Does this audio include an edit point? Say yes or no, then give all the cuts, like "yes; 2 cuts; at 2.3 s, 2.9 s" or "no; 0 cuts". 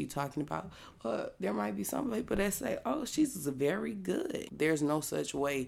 yes; 1 cut; at 4.5 s